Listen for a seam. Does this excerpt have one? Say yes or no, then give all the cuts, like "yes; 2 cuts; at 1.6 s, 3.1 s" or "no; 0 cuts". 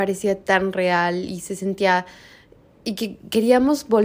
no; 0 cuts